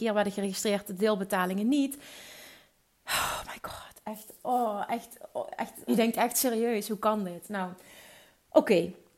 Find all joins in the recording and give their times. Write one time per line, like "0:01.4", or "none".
0:05.9